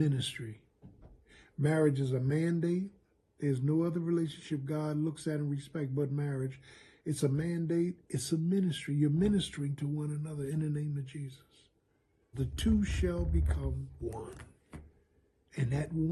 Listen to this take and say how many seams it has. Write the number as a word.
one